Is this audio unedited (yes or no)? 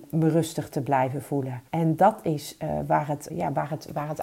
no